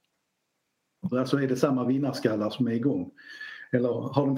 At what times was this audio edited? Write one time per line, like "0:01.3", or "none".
0:01.1

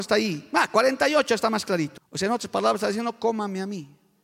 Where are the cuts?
0:02.0

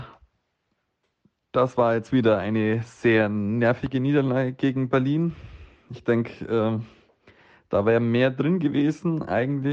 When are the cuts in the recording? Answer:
none

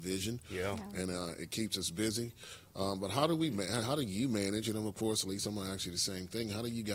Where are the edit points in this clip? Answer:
none

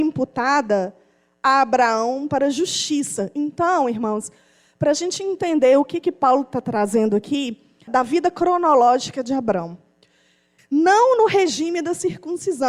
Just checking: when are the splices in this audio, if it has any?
0:07.9
0:10.6

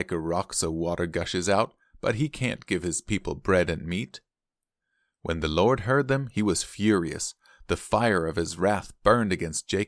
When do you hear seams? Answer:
none

